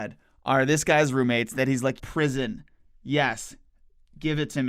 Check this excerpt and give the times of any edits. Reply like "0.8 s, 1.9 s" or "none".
2.0 s